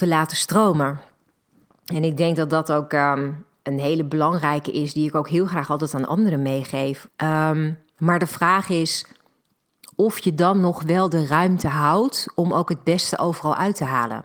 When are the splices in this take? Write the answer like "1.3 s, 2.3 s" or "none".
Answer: 7.1 s